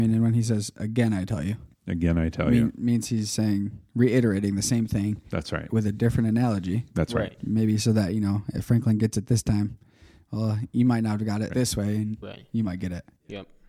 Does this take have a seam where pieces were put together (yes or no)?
yes